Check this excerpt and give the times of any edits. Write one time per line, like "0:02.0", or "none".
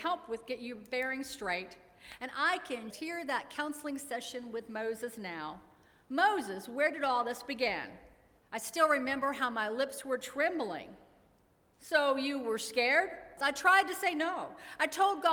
0:02.9
0:08.4
0:13.4